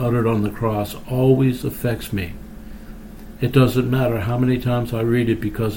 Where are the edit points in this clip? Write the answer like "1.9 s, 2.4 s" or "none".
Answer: none